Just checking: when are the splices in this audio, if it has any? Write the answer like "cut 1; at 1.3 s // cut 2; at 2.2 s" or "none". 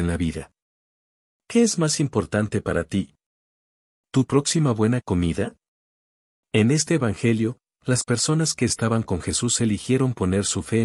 cut 1; at 6.4 s